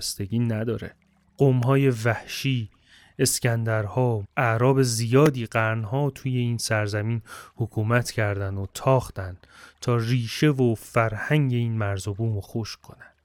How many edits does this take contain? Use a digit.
1